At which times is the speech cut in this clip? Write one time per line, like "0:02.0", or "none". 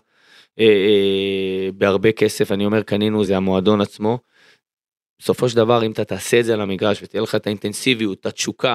0:03.3